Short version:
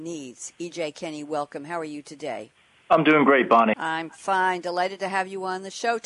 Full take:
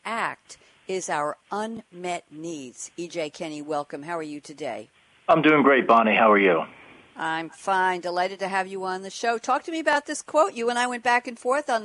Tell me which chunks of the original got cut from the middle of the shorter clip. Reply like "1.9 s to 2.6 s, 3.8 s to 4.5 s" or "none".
6.1 s to 7.1 s